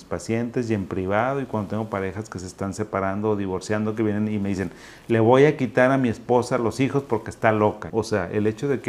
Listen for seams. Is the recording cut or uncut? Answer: cut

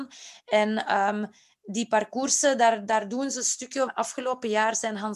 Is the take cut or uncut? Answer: cut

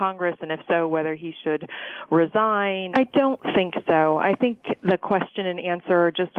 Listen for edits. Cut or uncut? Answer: cut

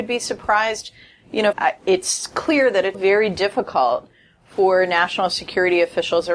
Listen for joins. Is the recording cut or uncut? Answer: cut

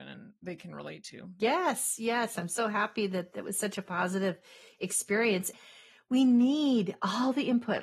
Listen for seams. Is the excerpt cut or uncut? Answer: uncut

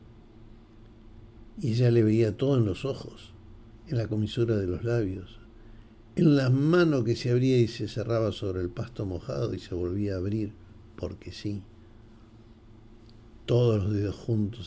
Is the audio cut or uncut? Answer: uncut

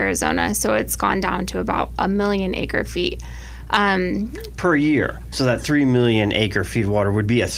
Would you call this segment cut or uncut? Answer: cut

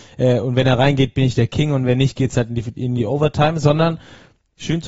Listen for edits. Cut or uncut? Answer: uncut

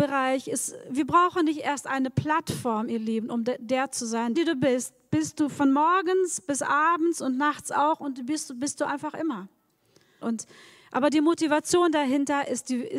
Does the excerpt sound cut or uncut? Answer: cut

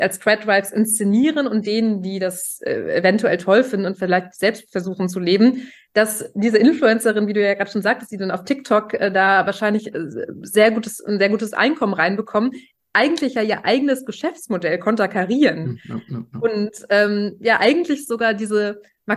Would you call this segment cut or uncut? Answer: uncut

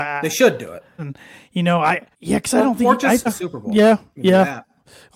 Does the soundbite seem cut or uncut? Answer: cut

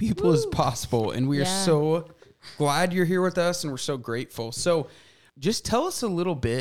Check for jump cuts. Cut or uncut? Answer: uncut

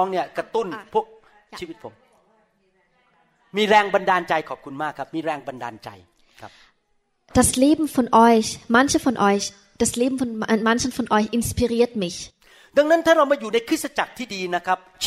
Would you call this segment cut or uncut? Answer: uncut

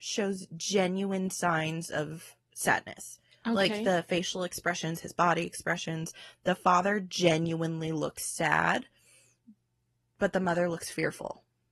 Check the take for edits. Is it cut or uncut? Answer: uncut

